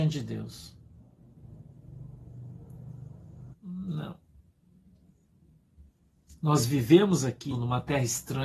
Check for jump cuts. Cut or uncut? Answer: cut